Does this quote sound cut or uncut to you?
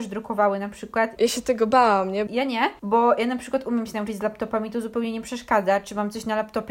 cut